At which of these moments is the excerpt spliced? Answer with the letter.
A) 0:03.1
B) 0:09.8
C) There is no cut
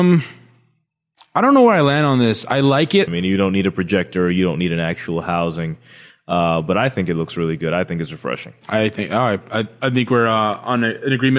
A